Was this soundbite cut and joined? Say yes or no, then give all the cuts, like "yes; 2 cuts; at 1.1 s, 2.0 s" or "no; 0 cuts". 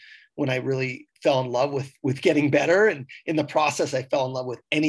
yes; 1 cut; at 1.1 s